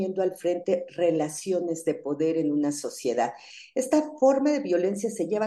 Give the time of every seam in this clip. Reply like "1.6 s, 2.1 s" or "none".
none